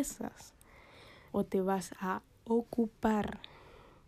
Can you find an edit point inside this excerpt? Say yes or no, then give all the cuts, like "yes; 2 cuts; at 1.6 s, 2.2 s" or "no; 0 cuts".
yes; 1 cut; at 1.3 s